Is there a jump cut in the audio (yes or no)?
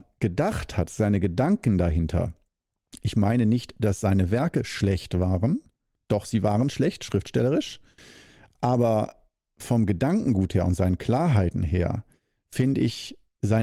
no